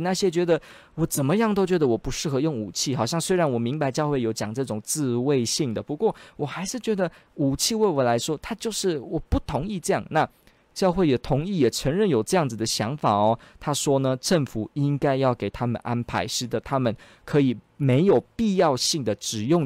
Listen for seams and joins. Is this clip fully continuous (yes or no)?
yes